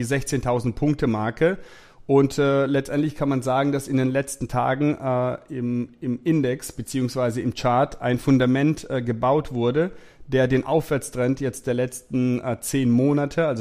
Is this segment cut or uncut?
uncut